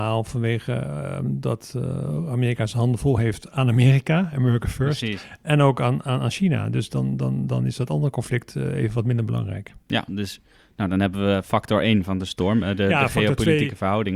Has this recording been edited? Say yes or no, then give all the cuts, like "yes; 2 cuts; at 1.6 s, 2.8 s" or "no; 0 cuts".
no; 0 cuts